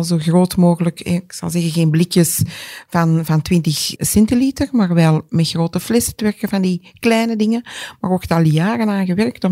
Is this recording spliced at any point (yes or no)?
yes